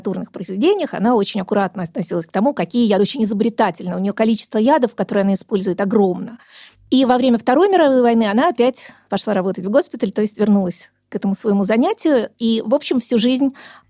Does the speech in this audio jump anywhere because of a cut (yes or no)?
no